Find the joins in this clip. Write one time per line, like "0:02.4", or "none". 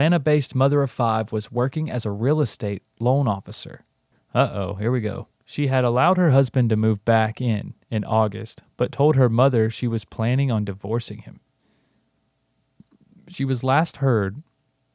0:04.1
0:05.3